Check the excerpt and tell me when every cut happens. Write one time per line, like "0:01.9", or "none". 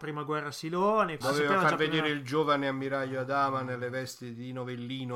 0:01.2